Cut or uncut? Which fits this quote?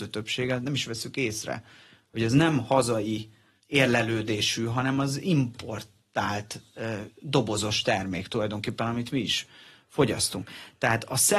uncut